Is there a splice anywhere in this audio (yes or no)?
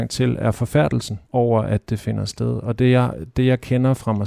yes